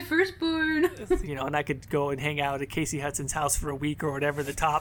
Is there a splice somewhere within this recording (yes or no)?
yes